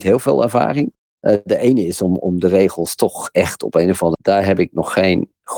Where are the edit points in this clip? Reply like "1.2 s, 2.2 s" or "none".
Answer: 4.1 s